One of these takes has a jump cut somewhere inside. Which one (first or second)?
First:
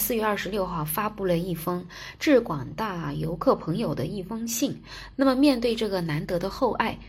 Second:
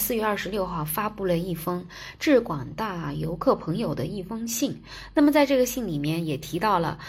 first